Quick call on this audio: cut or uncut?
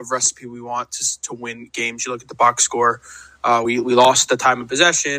uncut